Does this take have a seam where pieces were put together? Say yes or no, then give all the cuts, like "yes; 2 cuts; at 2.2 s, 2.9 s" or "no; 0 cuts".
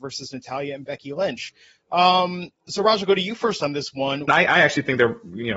yes; 1 cut; at 4.3 s